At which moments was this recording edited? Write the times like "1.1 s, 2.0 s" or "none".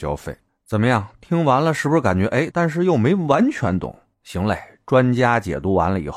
2.5 s